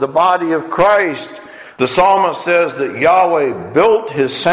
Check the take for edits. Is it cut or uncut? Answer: cut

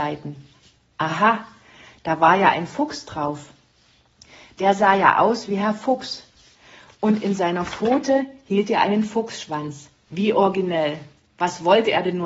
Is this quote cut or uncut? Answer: uncut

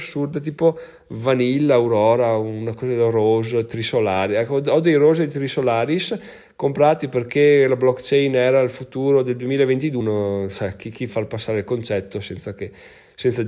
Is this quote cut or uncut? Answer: cut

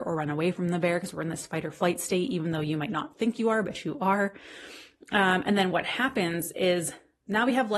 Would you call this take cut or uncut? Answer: uncut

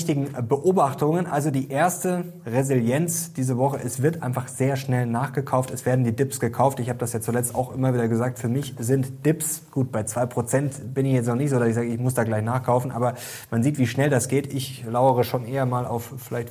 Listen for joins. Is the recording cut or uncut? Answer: uncut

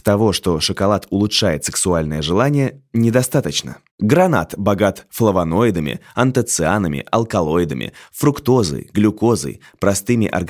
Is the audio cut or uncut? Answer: cut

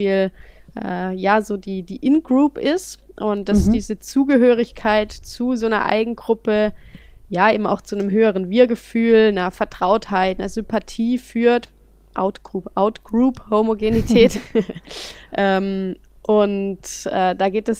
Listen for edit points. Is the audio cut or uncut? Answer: cut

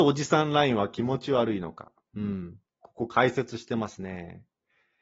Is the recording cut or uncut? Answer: uncut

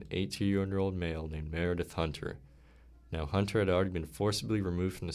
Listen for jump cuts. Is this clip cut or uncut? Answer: uncut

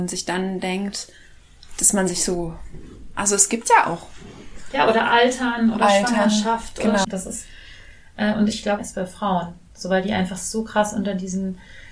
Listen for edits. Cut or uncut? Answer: cut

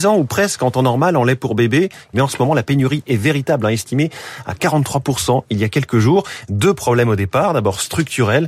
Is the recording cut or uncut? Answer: cut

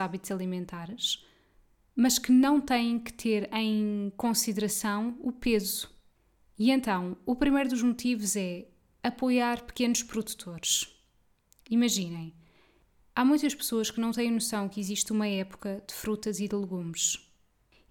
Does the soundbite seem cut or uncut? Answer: uncut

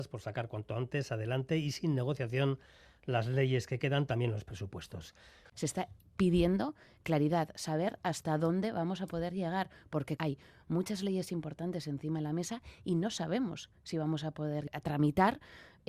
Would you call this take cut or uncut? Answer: cut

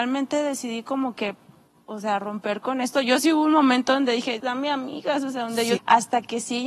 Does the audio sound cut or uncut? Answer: cut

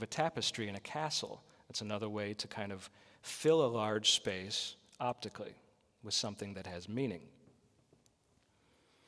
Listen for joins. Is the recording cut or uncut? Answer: uncut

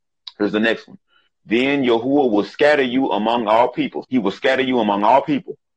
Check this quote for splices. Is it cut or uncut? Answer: cut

